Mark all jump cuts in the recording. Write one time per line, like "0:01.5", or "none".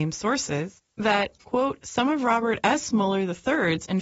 none